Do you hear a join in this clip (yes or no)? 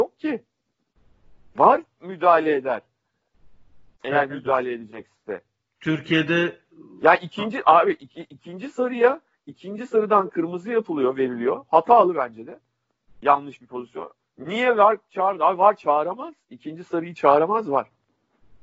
no